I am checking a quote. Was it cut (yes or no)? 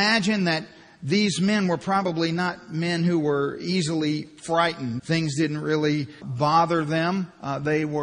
yes